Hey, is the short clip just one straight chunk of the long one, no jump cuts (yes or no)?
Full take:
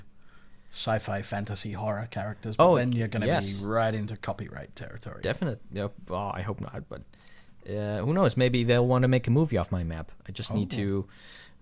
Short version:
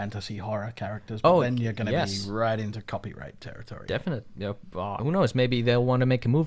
no